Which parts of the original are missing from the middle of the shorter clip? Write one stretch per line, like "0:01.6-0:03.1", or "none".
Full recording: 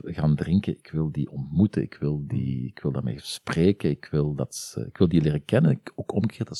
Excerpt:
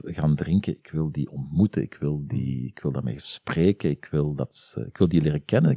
none